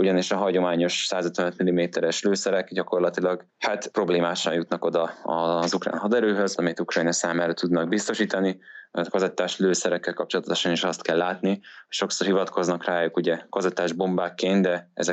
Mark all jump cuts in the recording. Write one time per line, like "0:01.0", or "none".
0:03.5
0:06.6